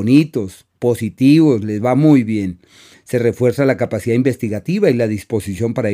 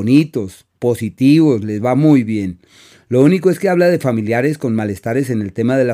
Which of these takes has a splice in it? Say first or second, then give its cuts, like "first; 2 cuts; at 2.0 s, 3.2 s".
first; 1 cut; at 2.9 s